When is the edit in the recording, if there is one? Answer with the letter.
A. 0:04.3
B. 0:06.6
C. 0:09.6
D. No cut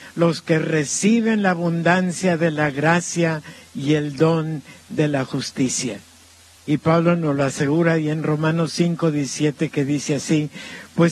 B